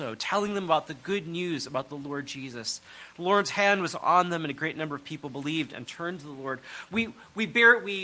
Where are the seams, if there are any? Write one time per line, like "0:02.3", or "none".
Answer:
0:06.9